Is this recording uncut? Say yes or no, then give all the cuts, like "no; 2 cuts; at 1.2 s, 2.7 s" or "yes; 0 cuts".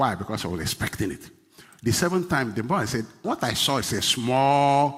no; 1 cut; at 3.2 s